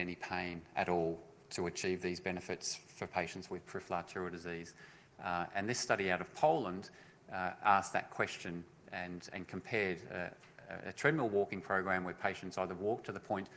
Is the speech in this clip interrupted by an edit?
no; 0 cuts

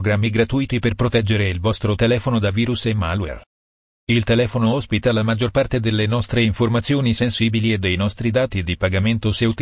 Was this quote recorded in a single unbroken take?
no; 1 cut; at 3.9 s

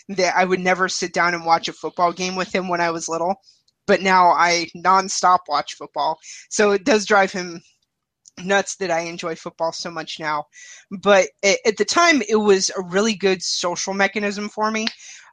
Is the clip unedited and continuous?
yes; 0 cuts

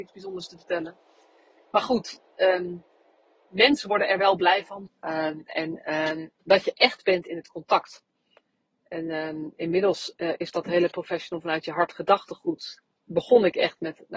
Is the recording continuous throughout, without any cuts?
no; 1 cut; at 4.9 s

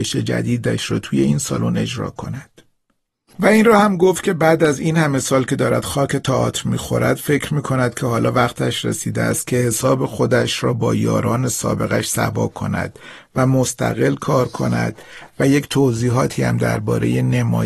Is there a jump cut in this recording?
no; 0 cuts

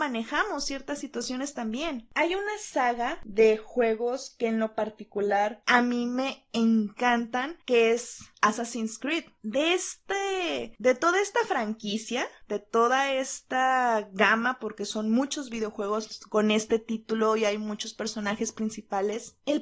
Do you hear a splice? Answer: no; 0 cuts

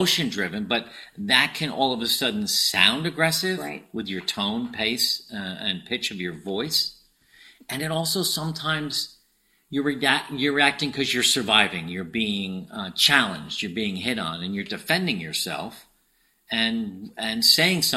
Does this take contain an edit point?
no; 0 cuts

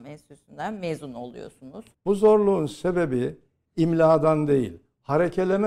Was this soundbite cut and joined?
yes; 1 cut; at 1.9 s

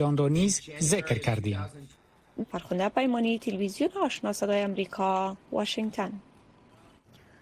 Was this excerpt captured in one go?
no; 2 cuts; at 2.4 s, 5.4 s

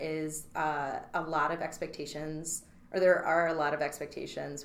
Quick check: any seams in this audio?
no; 0 cuts

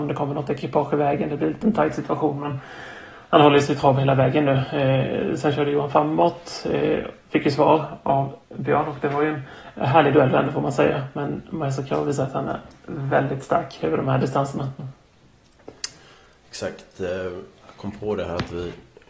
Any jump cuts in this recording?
yes; 1 cut; at 8.4 s

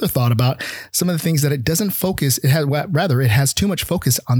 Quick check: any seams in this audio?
no; 0 cuts

